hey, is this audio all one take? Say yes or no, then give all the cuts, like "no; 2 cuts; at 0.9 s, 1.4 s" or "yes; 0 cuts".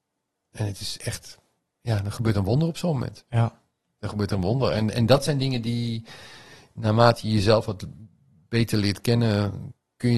yes; 0 cuts